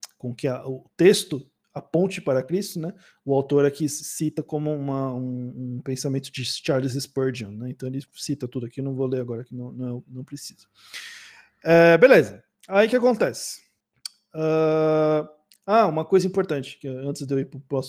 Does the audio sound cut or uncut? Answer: uncut